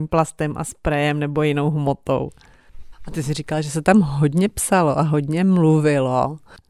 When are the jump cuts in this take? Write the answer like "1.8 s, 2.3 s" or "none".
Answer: 2.9 s